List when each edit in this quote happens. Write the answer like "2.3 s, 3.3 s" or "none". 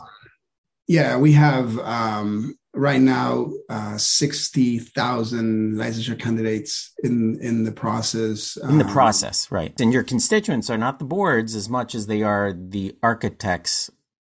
9.8 s